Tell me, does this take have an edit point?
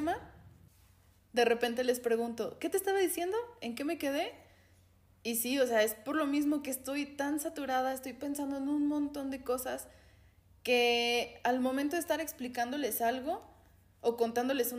no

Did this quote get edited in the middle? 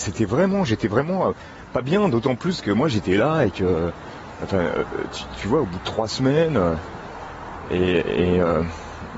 no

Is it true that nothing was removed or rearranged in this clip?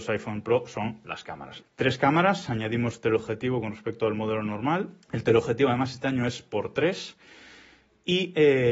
no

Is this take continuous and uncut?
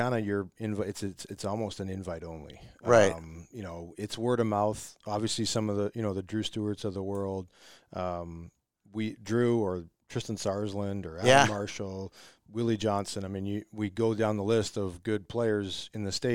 yes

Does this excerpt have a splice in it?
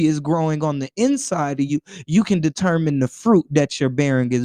no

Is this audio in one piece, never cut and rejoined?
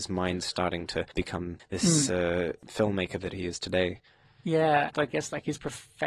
no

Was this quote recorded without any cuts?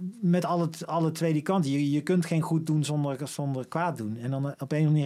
yes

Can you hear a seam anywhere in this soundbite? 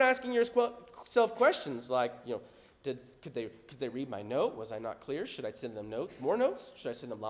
no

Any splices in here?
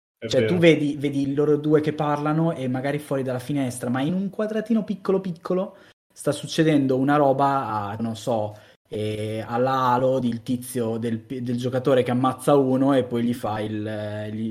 yes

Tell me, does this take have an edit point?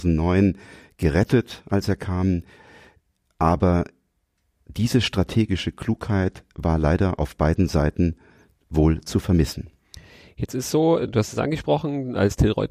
no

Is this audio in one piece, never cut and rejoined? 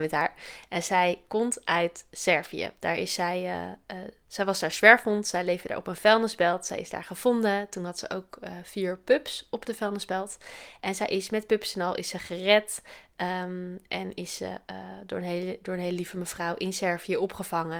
yes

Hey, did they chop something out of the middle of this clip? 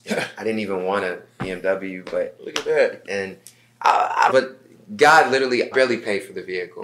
yes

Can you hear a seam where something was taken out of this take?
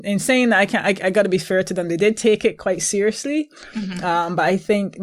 no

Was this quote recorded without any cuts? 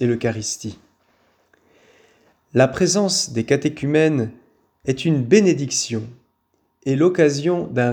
yes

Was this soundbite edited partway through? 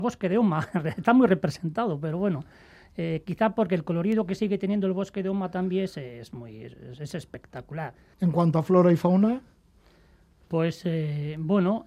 yes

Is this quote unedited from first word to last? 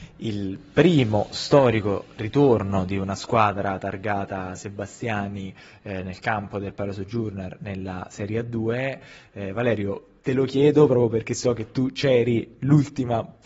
yes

